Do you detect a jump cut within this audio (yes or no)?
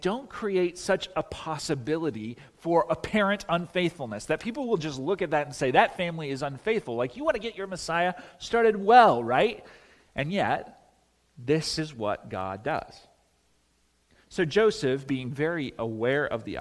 no